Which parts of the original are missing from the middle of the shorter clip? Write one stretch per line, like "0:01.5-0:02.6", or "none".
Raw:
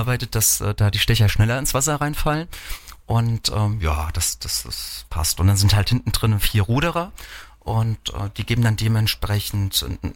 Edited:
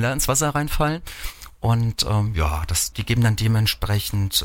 0:04.4-0:08.3